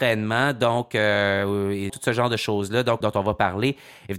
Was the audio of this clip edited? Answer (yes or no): yes